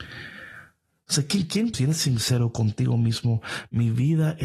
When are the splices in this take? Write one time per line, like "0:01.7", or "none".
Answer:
0:01.7